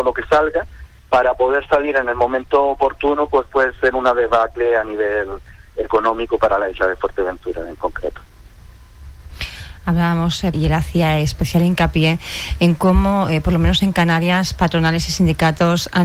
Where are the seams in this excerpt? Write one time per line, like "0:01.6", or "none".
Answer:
0:01.0
0:10.5